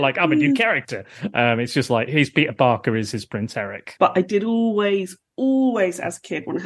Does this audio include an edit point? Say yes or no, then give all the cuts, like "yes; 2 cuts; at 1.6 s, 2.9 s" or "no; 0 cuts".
yes; 1 cut; at 4.0 s